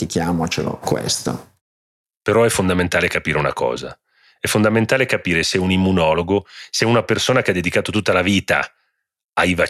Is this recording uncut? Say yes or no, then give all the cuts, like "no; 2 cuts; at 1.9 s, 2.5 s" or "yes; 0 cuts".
yes; 0 cuts